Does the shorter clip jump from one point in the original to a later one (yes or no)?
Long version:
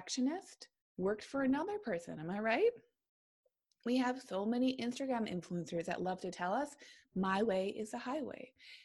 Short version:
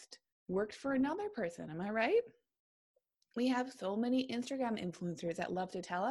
no